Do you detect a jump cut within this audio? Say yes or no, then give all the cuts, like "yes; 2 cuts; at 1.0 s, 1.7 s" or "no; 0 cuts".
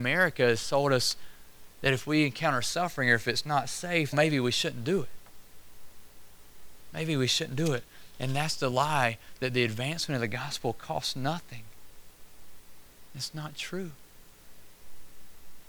yes; 2 cuts; at 4.1 s, 13.1 s